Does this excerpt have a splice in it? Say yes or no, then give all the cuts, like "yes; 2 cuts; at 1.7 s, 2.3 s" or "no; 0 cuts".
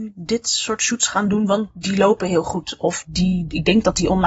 no; 0 cuts